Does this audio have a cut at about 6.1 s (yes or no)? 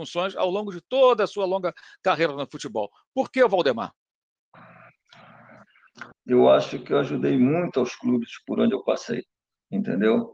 yes